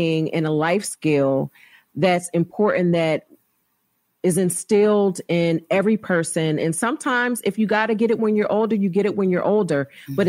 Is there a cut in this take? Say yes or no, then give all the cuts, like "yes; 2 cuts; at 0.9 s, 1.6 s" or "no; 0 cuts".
no; 0 cuts